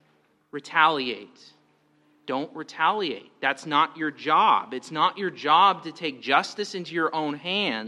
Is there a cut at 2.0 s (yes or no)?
no